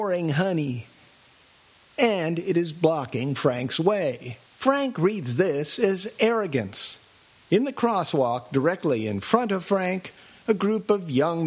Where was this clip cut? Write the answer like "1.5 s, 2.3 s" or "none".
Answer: 4.5 s, 7.3 s